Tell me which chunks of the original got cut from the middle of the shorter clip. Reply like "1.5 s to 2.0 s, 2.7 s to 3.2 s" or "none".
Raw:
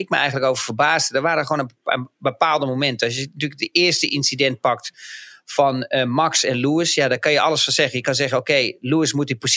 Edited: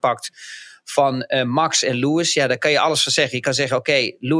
none